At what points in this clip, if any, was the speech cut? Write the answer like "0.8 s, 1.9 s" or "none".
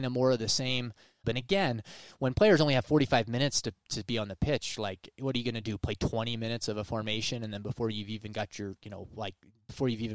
1.2 s